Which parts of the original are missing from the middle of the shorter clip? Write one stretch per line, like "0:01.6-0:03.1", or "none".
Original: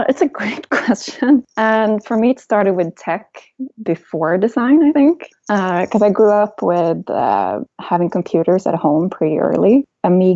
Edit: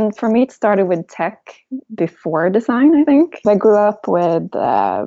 0:05.3-0:06.0